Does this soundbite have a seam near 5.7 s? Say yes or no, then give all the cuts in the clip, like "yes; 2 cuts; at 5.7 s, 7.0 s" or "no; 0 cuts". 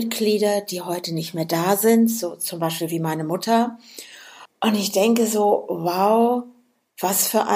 no; 1 cut; at 4.5 s